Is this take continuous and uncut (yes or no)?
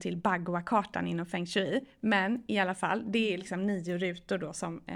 yes